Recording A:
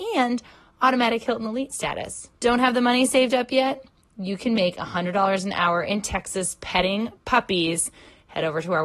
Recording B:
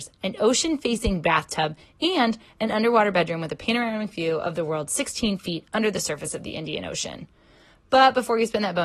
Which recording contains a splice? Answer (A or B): A